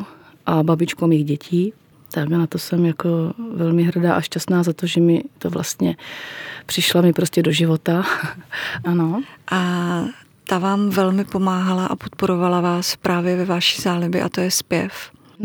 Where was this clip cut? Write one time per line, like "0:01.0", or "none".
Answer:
0:08.8

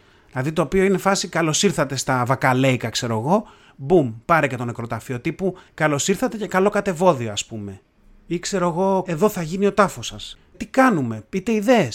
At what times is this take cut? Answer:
0:09.0
0:10.5

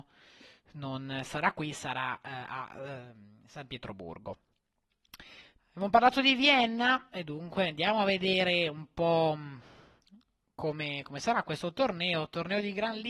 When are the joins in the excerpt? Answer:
0:05.6

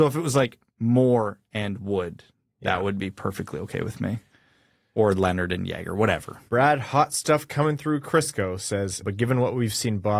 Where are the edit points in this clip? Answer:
0:06.5
0:09.0

